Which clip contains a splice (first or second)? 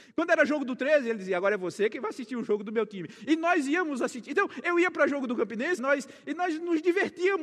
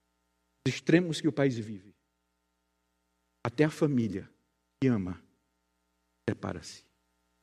first